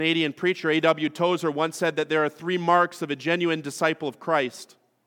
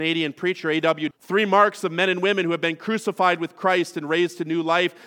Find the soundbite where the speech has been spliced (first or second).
second